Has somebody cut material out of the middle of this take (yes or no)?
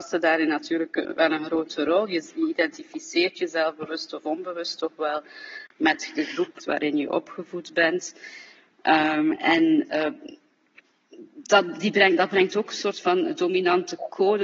yes